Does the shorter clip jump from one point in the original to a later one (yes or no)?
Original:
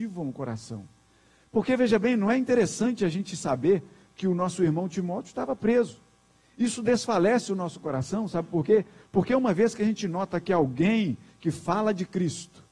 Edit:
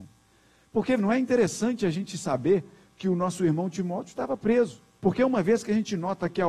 yes